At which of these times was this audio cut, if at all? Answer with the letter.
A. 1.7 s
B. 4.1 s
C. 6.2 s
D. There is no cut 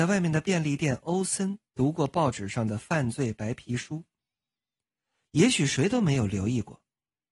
A